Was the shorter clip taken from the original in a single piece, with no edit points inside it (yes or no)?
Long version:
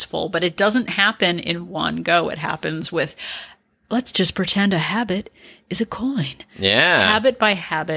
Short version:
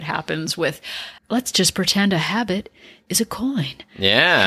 no